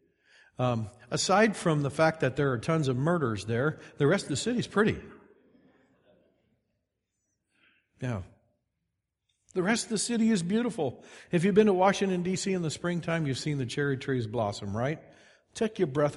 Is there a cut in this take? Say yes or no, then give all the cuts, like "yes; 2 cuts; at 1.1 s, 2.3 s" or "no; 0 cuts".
no; 0 cuts